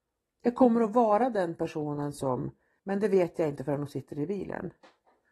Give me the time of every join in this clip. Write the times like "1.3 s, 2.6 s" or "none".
2.8 s